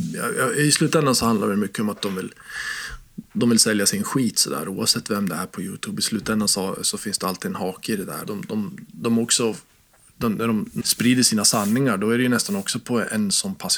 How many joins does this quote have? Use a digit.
2